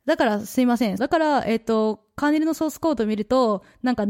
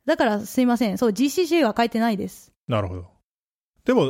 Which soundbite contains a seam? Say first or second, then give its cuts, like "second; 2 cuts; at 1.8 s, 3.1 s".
first; 1 cut; at 1.0 s